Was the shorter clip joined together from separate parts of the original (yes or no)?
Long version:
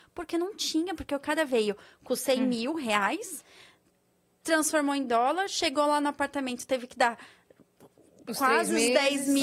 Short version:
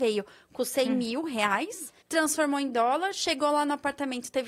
yes